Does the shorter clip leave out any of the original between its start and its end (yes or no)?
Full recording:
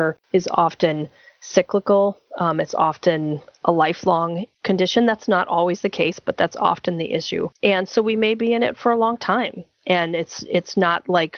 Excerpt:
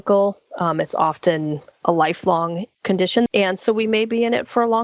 yes